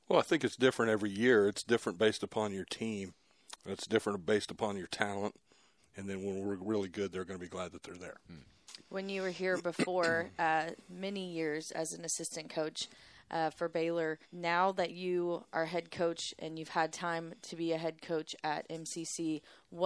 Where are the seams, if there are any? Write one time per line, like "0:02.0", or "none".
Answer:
0:05.8
0:14.2